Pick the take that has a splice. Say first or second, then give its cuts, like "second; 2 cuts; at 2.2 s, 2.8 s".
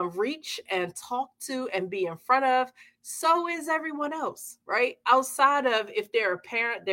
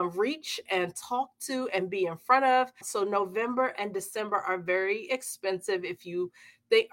second; 1 cut; at 2.8 s